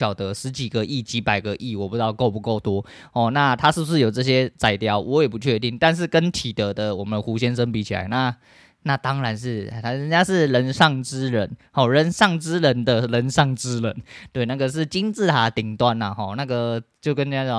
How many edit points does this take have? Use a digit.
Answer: 0